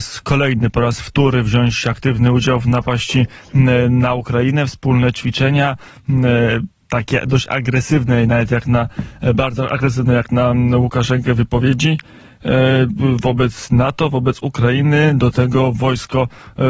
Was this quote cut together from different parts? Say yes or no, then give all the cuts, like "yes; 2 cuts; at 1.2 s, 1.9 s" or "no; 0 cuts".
no; 0 cuts